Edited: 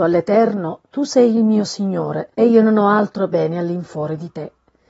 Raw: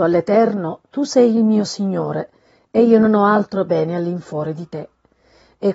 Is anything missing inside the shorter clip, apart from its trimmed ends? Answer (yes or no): yes